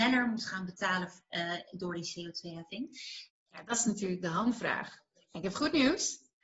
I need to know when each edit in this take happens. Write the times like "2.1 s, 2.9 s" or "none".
3.3 s